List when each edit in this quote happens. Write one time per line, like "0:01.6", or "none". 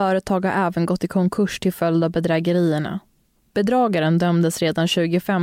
none